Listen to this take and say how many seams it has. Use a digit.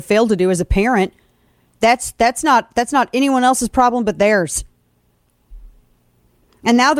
0